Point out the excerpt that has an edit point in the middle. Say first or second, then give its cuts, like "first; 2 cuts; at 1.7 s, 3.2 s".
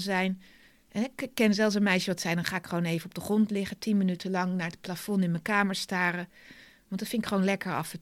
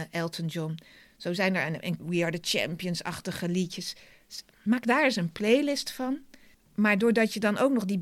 second; 2 cuts; at 2.0 s, 6.5 s